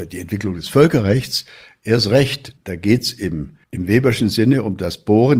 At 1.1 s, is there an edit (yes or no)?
no